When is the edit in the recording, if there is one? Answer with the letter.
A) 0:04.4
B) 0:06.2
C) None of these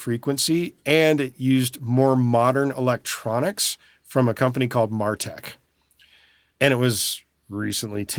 C